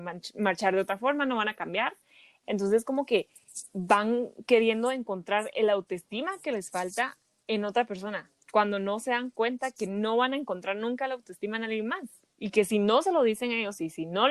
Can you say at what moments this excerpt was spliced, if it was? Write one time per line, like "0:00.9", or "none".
0:02.4